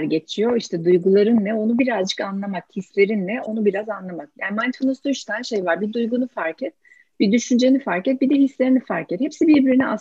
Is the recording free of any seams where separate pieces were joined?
yes; 0 cuts

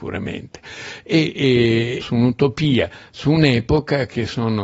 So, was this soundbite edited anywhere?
yes; 1 cut; at 2.0 s

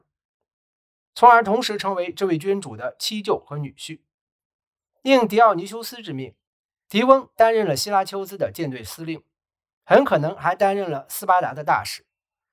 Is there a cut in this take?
no; 0 cuts

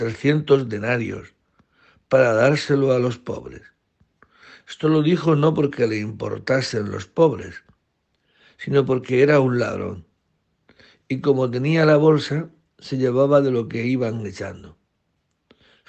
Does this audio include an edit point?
no; 0 cuts

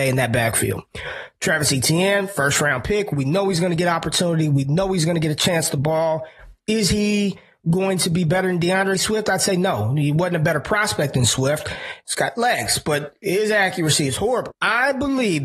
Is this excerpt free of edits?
no; 2 cuts; at 12.0 s, 14.5 s

